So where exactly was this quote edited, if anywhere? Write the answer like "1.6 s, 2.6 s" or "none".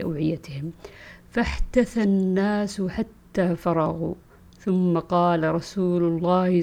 none